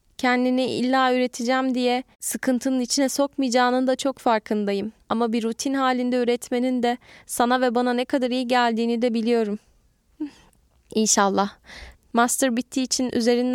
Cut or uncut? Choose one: cut